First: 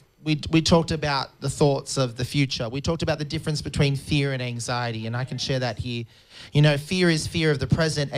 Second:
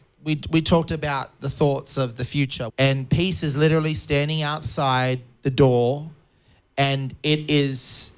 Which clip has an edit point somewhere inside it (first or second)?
second